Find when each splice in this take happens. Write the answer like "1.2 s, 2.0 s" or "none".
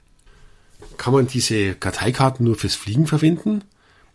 none